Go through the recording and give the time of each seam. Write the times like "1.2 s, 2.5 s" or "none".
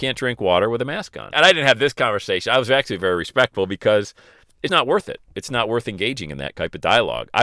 1.3 s, 4.7 s